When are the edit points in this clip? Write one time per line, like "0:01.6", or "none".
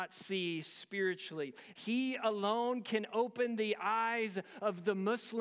0:01.7